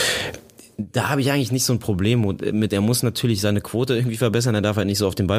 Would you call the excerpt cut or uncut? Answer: uncut